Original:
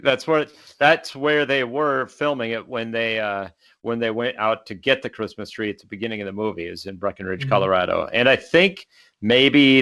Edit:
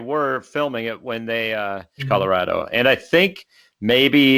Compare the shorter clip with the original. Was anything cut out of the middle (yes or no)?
yes